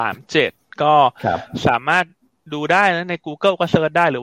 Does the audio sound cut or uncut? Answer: uncut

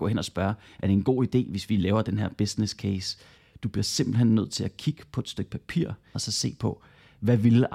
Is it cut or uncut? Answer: cut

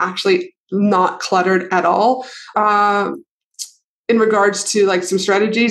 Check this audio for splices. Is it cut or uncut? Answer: cut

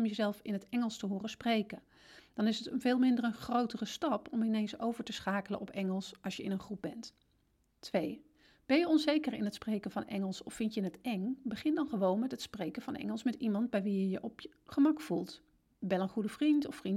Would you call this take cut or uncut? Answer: uncut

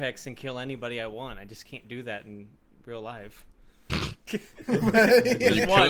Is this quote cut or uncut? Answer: cut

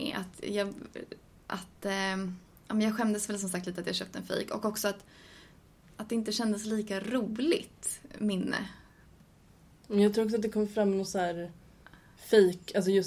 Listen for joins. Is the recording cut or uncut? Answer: uncut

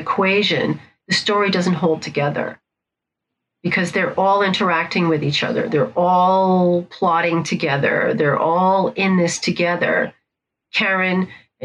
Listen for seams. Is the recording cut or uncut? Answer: uncut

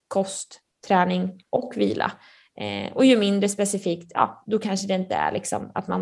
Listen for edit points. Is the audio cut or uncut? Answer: uncut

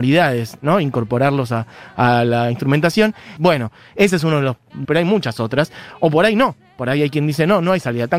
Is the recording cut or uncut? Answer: cut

